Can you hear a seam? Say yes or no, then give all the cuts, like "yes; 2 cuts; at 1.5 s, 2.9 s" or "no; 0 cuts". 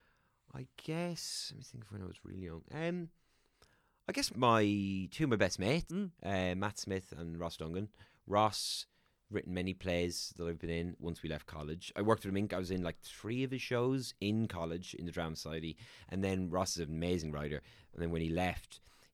yes; 3 cuts; at 4.3 s, 5.9 s, 11.0 s